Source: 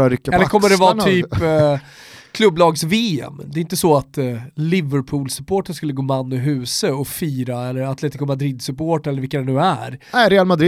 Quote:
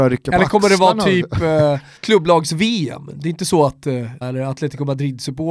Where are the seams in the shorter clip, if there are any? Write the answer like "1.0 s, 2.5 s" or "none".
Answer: 2.0 s, 4.2 s